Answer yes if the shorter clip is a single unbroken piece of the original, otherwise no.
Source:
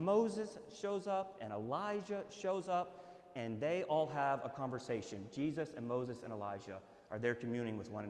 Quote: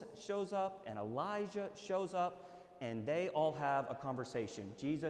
yes